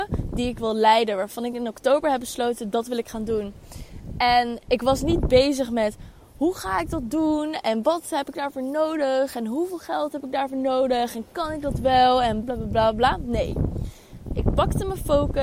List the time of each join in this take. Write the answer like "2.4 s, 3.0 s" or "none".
12.4 s